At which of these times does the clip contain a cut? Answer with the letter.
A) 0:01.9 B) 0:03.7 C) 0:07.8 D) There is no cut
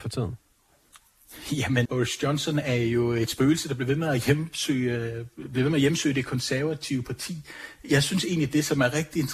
A